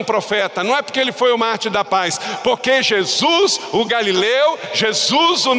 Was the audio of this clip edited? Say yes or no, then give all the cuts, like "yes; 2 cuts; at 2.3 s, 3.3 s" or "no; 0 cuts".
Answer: no; 0 cuts